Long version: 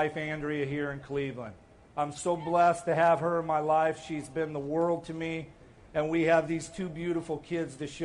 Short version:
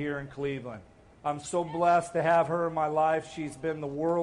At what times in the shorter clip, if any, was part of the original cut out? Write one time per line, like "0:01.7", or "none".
none